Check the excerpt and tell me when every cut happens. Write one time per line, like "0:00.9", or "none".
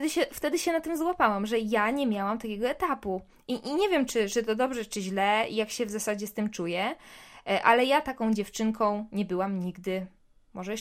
none